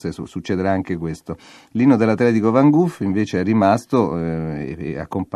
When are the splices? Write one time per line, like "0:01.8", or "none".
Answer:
none